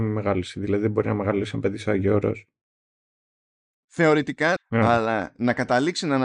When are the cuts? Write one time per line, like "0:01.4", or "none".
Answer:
0:04.6

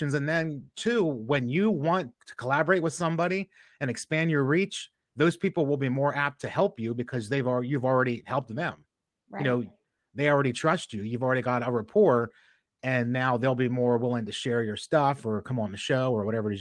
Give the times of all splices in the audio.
0:02.1

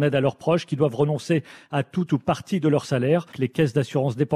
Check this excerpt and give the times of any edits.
0:03.3

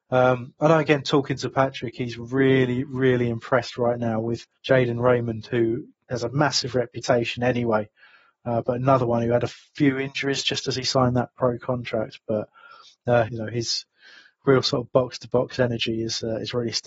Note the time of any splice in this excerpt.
0:04.5
0:13.3

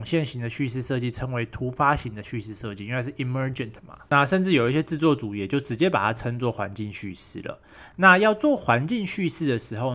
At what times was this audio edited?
0:04.1

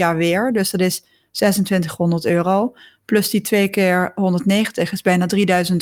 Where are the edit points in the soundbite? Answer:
none

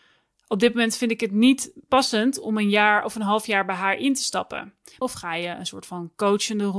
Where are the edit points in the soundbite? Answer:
0:05.0

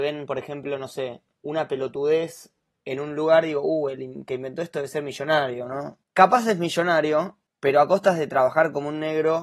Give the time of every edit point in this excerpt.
none

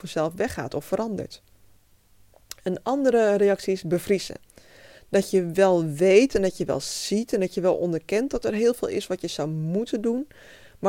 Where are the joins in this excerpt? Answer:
none

